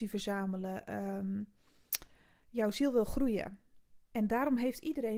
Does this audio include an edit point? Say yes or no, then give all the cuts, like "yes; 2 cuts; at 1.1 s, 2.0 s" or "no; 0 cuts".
yes; 1 cut; at 4.1 s